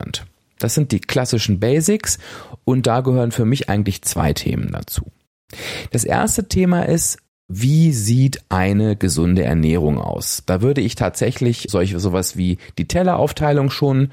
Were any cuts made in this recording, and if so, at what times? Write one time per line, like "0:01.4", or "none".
0:11.7